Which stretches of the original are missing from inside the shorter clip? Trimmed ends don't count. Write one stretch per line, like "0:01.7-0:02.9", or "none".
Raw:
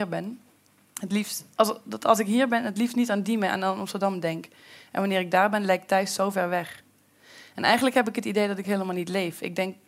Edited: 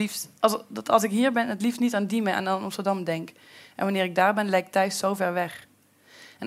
none